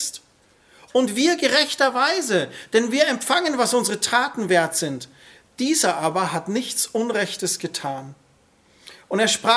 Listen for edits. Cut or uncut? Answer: uncut